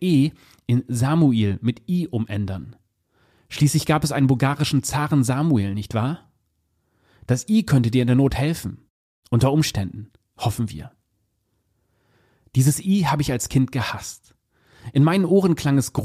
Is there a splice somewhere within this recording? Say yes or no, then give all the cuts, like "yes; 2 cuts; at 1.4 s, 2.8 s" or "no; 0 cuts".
no; 0 cuts